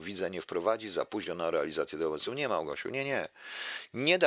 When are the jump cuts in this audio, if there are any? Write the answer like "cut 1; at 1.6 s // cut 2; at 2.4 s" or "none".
none